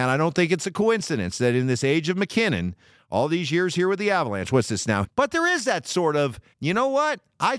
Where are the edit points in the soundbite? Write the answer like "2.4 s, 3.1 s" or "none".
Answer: 5.0 s, 6.5 s